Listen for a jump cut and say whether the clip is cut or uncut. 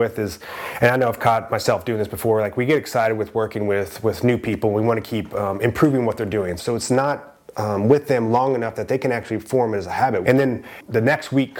cut